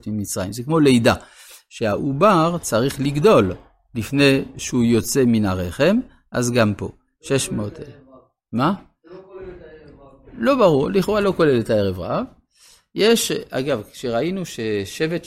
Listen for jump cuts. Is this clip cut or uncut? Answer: uncut